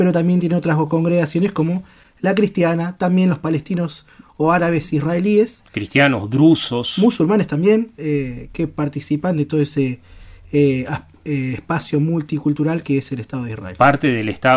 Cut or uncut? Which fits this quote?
uncut